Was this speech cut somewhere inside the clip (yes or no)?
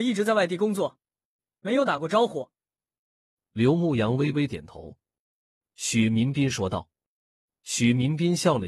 yes